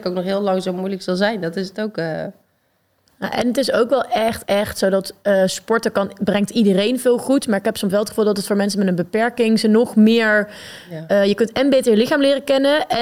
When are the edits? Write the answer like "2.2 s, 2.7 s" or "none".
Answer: 4.4 s